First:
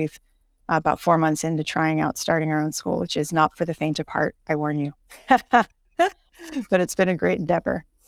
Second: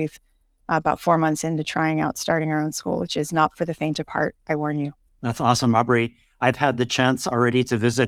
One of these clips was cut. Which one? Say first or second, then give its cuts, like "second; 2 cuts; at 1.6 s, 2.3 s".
second; 1 cut; at 5.1 s